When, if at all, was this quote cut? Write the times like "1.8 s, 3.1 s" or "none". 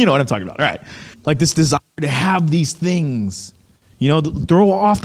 1.1 s